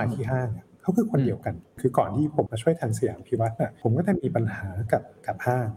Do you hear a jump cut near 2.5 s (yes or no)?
yes